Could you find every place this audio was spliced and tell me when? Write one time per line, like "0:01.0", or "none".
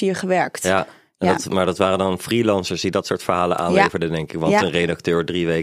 none